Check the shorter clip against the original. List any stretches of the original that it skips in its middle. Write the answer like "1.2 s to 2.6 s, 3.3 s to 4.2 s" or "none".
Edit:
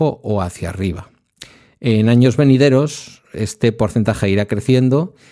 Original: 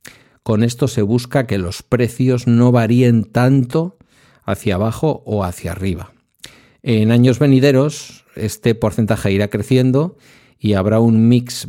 none